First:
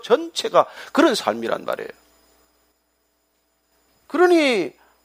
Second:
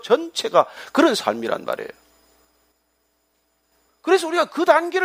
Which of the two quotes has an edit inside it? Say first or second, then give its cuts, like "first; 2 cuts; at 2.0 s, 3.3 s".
second; 1 cut; at 3.9 s